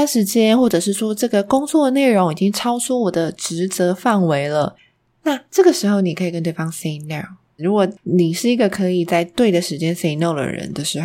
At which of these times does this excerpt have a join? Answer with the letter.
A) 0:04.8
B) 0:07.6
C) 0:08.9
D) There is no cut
B